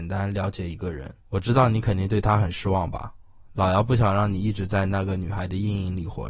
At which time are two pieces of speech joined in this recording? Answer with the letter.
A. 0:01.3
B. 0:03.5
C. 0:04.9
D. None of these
A